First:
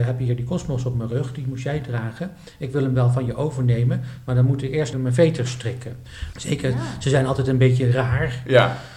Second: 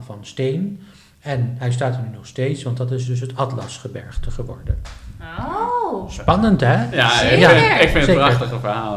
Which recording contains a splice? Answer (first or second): first